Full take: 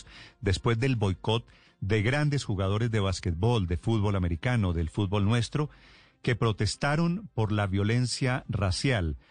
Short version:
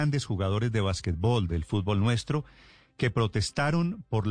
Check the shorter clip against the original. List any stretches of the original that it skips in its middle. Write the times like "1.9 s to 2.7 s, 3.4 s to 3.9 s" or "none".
3.7 s to 4.7 s